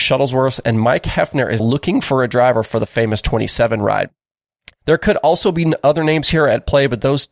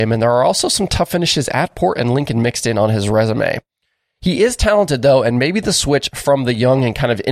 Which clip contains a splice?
first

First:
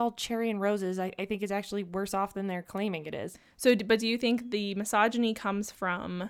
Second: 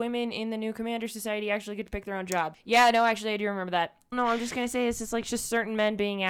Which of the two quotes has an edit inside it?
second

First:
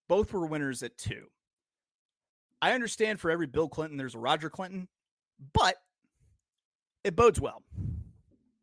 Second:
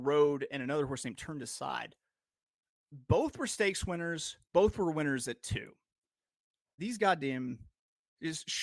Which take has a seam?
second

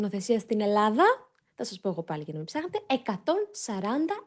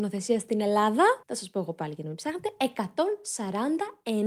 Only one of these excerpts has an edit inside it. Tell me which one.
second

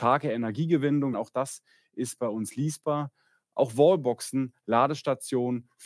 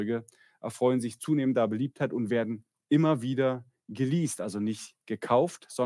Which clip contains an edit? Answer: first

